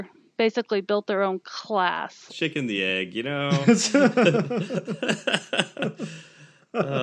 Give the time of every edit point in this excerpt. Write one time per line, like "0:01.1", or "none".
0:02.3